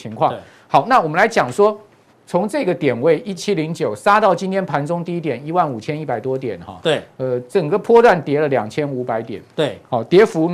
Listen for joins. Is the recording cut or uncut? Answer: cut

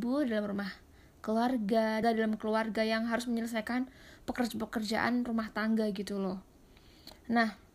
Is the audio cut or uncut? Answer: cut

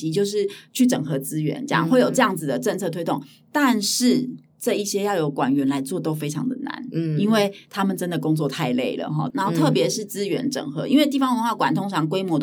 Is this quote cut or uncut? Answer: cut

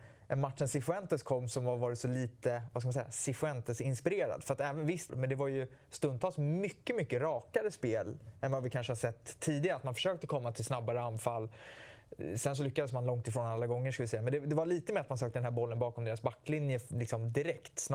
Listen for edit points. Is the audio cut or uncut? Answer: cut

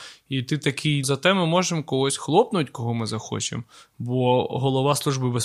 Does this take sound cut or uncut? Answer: cut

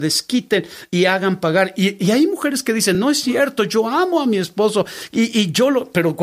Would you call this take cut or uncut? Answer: uncut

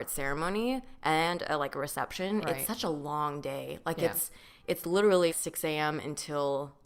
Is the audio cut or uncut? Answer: cut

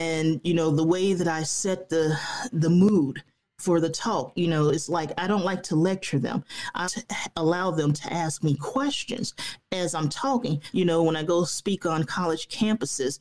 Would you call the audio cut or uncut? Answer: cut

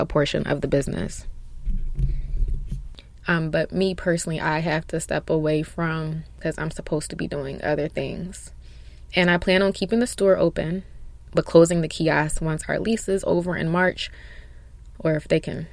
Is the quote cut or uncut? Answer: cut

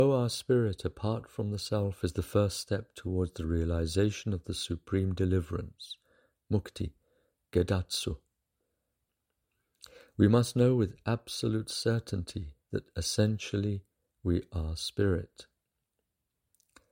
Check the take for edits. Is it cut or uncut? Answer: uncut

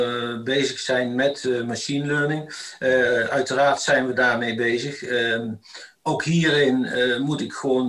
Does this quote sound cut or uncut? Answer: cut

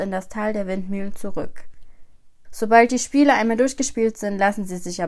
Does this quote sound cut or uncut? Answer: cut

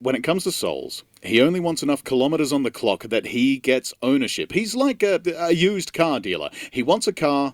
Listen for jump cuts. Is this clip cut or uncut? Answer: uncut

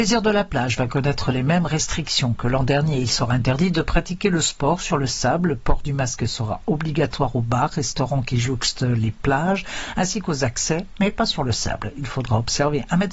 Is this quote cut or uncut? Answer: uncut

